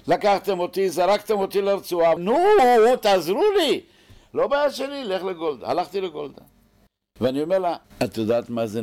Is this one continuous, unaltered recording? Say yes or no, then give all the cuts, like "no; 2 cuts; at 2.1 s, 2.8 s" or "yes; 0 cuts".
no; 2 cuts; at 2.2 s, 7.8 s